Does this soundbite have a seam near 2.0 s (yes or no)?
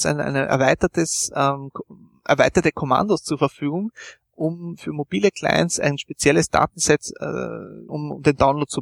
no